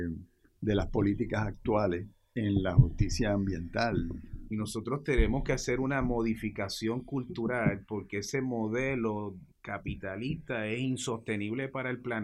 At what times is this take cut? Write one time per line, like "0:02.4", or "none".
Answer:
0:04.5
0:09.5